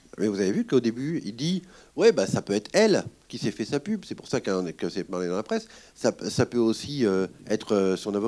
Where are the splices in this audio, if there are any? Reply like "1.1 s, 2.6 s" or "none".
none

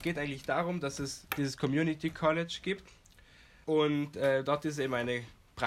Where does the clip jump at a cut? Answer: 3.6 s

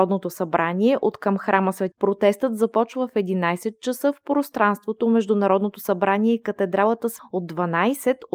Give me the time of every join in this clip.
1.9 s, 7.2 s

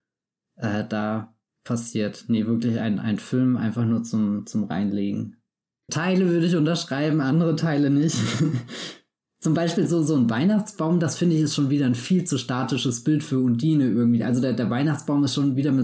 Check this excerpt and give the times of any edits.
5.9 s

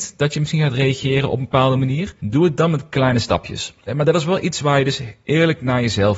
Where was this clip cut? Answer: 2.2 s, 3.9 s

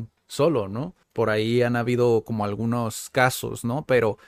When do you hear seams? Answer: 1.0 s

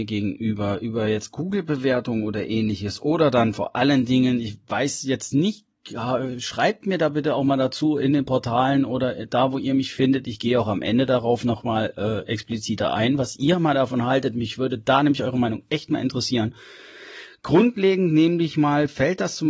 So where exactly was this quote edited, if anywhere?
none

